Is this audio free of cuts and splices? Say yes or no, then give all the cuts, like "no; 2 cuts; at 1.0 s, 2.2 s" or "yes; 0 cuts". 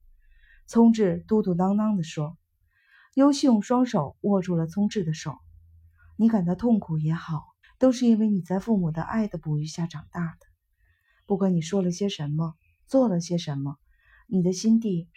no; 1 cut; at 7.6 s